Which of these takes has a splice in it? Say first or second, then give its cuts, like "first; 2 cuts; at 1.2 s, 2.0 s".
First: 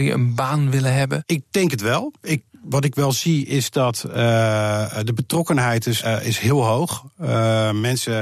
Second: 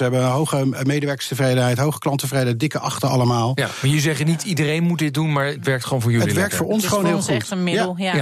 first; 1 cut; at 6.0 s